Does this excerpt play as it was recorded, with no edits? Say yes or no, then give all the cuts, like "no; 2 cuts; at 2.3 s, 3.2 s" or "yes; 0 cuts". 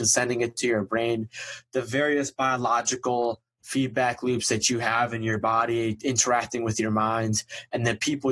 yes; 0 cuts